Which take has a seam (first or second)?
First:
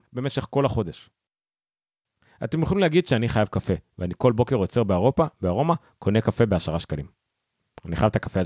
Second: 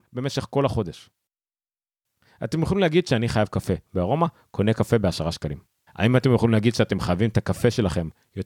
second